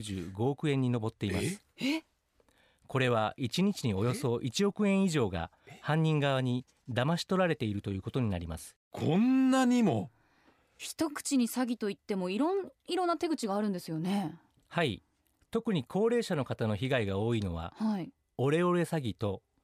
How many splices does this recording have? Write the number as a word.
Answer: zero